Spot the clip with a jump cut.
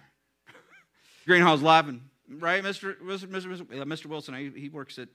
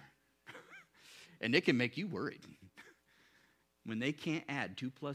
first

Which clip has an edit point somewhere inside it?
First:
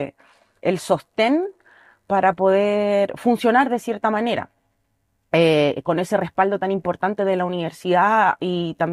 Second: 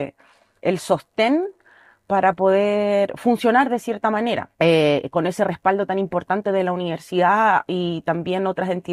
second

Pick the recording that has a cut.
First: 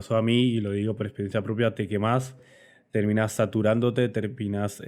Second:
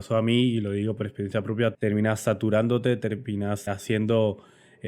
second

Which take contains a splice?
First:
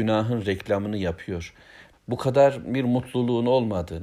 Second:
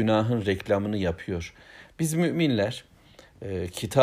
first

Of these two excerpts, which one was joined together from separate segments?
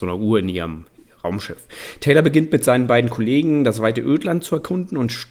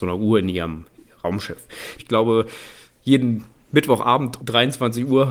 second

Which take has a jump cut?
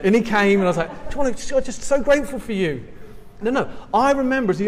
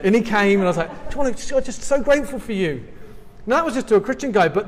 first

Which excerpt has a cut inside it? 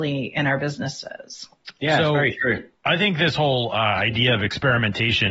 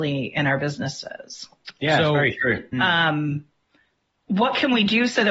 second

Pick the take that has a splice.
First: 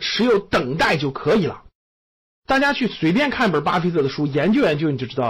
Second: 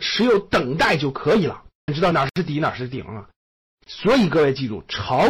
second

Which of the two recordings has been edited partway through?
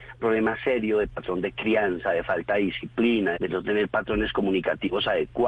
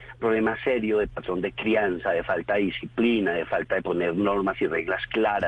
first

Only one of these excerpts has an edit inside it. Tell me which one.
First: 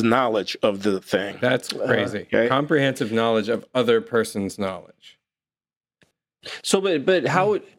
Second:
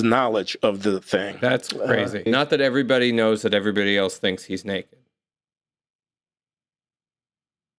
second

